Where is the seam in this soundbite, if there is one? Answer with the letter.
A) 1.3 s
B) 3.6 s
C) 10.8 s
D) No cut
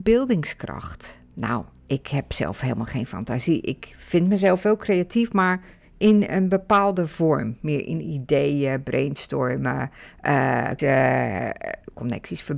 C